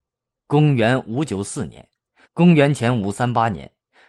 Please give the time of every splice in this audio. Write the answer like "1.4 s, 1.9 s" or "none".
2.2 s